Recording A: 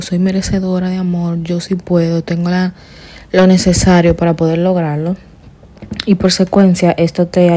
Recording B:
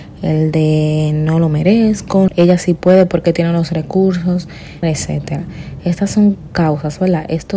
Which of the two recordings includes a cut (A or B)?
B